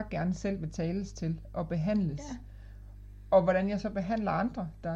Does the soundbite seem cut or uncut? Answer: uncut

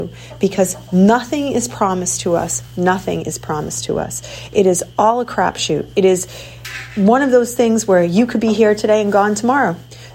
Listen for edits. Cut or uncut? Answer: uncut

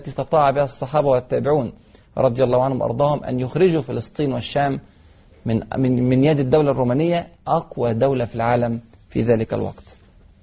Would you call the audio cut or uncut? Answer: uncut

